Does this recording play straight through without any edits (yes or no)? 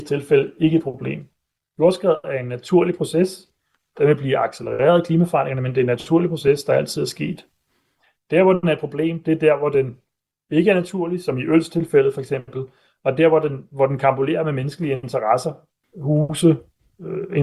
no